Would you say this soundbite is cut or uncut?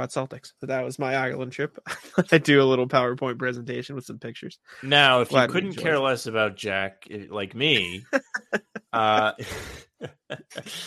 uncut